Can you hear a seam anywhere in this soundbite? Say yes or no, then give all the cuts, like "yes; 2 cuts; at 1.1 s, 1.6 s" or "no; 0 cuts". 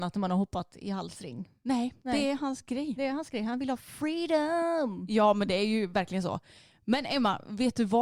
no; 0 cuts